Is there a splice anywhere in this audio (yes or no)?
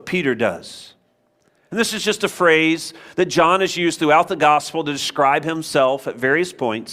yes